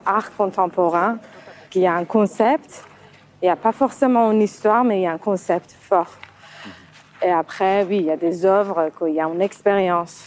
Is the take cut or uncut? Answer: uncut